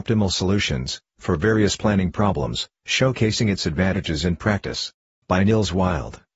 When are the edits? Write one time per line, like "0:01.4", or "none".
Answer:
0:05.2